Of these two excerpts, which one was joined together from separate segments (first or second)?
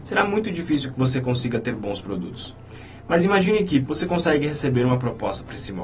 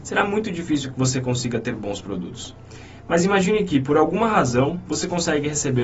first